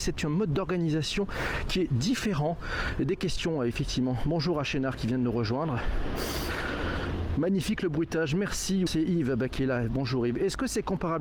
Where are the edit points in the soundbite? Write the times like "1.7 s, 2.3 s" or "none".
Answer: 8.9 s

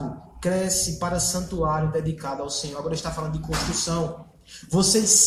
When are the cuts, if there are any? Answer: none

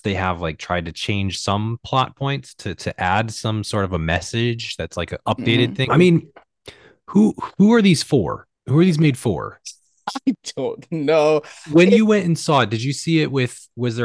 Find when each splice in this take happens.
5.9 s, 8.6 s

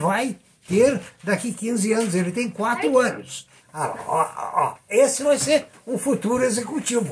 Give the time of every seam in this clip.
3.6 s

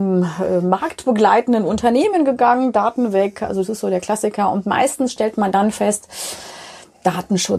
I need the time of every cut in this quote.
none

